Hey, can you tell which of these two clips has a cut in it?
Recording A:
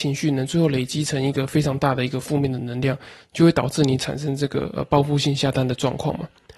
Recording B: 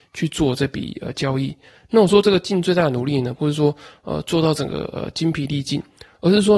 B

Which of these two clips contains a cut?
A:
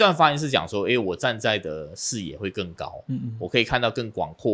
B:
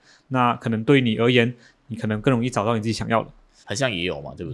B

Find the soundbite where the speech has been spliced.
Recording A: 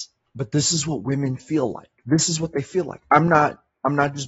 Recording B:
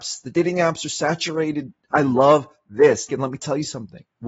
B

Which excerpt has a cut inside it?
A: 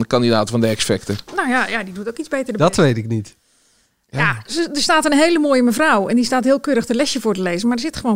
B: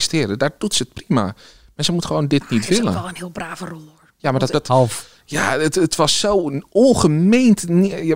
B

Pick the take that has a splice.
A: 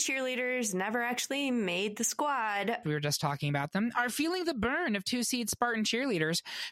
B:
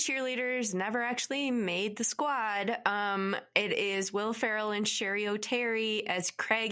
A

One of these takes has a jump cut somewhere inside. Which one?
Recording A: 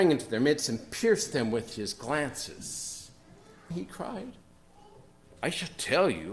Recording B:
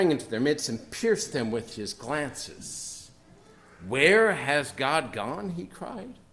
A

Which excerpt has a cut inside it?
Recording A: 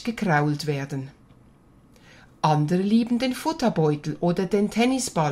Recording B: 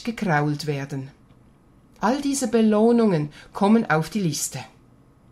B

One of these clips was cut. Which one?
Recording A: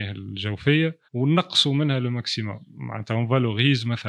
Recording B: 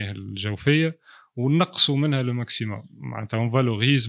A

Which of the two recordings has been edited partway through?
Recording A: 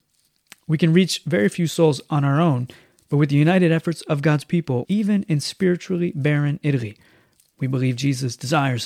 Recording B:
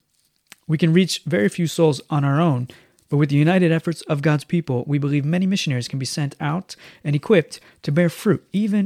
A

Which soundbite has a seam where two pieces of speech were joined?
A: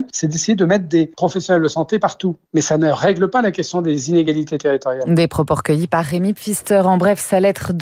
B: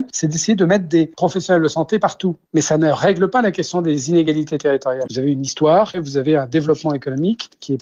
B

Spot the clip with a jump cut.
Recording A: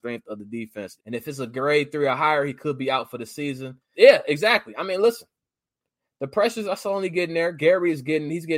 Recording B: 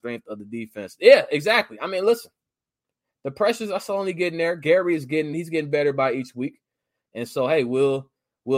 A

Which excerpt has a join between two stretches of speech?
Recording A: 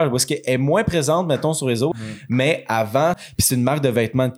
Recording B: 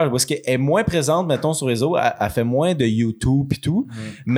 A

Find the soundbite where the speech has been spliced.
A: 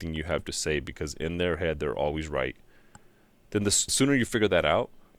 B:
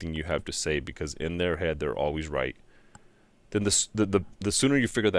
A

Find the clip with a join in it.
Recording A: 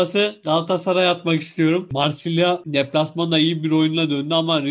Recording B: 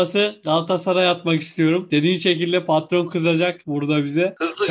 A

